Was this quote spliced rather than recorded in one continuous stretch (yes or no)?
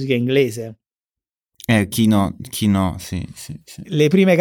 no